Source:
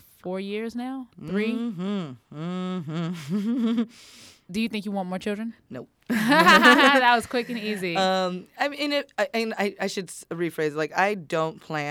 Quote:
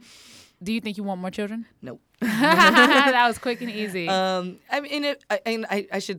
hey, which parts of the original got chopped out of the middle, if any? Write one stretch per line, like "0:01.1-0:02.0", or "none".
none